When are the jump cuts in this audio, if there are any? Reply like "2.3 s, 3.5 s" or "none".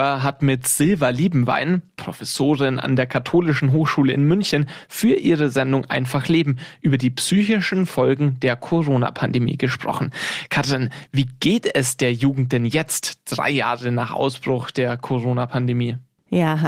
none

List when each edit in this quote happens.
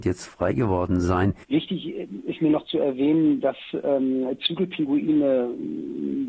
1.4 s

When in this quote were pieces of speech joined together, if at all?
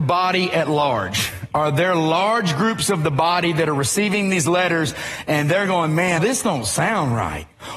6.2 s

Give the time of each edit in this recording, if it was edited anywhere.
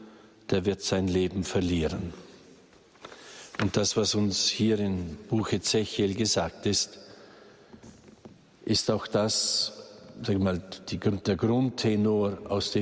none

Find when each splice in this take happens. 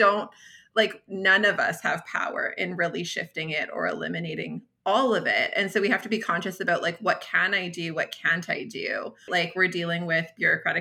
9.3 s

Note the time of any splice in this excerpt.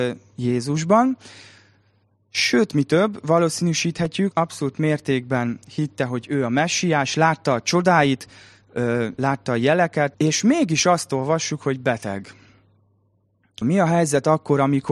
4.3 s, 10.1 s, 13.6 s

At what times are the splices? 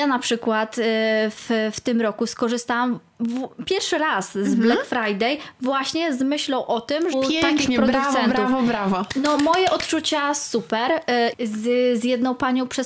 7.1 s, 11.3 s

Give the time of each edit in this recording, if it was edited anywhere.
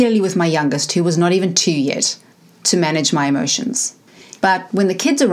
4.4 s

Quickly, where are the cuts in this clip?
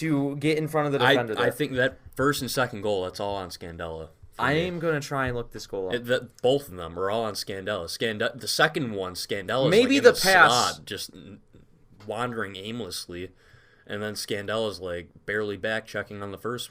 none

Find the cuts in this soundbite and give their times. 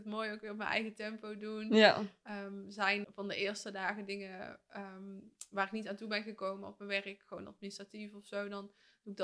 3.0 s

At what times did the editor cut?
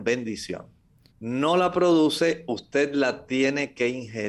1.1 s

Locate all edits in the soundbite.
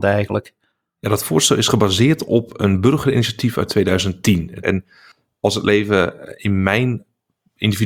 4.6 s

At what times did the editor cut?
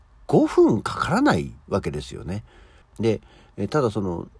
2.8 s

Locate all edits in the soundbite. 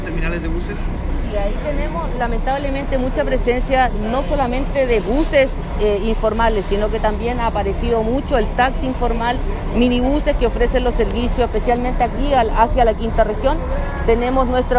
none

